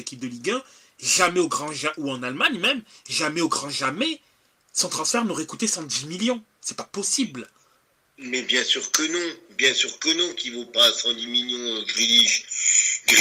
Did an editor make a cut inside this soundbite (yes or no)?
no